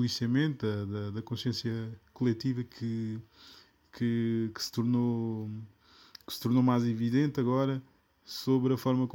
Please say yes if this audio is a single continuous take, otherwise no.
yes